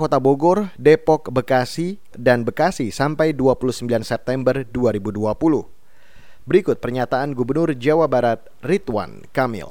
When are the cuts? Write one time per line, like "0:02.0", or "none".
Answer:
0:02.1
0:06.4